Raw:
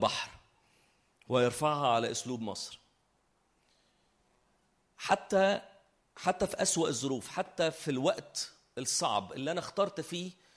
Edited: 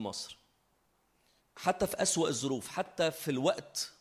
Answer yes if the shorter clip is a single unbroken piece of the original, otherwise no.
no